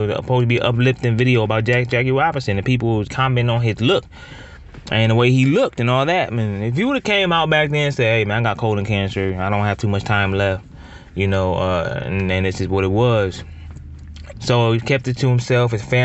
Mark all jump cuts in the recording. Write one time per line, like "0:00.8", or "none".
0:03.1
0:14.3